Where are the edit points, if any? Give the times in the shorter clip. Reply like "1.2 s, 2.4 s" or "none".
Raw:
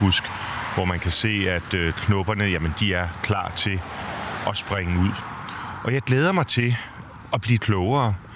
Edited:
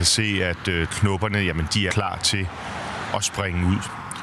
1.9 s

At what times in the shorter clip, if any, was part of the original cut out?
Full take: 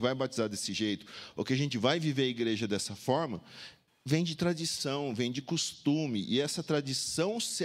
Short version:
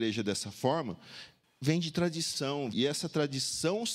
2.7 s

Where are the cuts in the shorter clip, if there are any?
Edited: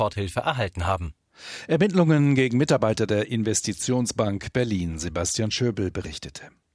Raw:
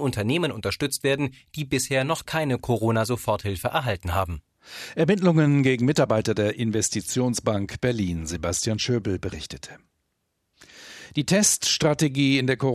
none

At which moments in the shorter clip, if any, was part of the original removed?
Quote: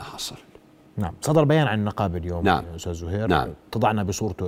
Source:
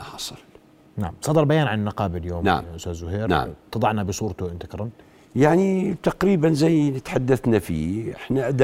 none

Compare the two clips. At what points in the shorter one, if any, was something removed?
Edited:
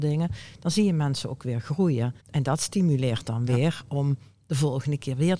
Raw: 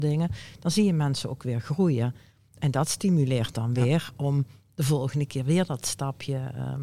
2.2 s

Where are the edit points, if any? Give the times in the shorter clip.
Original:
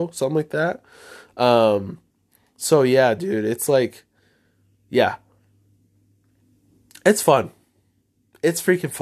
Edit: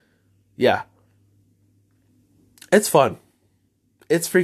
none

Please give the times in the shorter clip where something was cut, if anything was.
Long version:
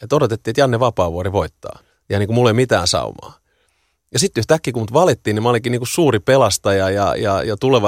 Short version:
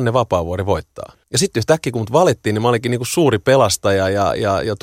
1.2 s

